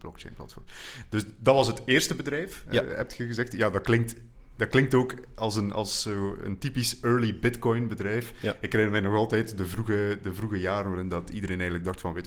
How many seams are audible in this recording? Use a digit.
0